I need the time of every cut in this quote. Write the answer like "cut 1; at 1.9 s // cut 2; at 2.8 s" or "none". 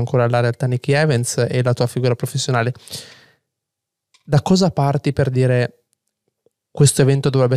none

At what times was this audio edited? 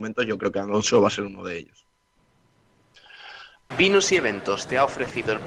cut 1; at 3.7 s

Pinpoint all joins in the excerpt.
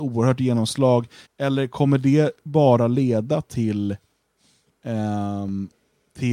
cut 1; at 1.3 s

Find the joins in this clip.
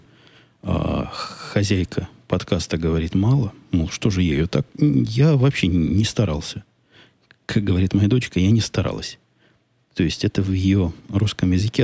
none

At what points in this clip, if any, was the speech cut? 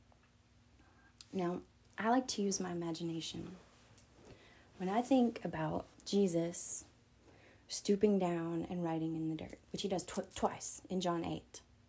cut 1; at 5.9 s // cut 2; at 9.6 s

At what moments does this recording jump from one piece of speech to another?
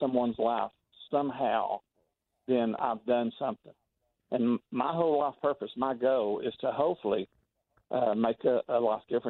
none

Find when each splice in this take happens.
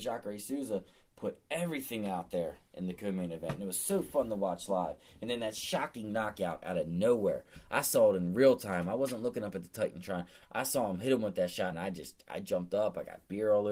cut 1; at 11.7 s

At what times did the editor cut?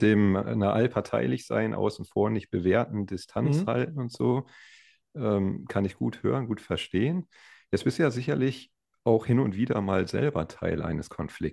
none

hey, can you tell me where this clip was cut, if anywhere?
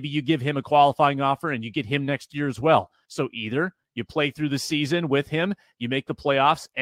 cut 1; at 3.0 s // cut 2; at 5.7 s

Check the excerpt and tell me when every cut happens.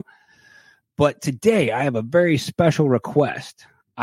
none

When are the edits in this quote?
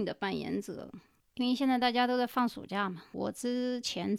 cut 1; at 1.2 s // cut 2; at 3.1 s

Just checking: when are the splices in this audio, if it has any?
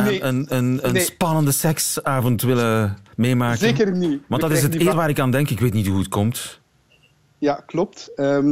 cut 1; at 4.9 s

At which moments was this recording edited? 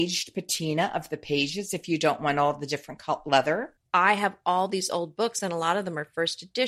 cut 1; at 3.8 s

